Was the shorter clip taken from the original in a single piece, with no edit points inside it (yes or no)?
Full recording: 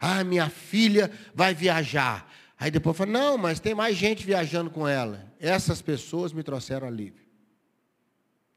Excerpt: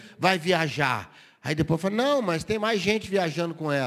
yes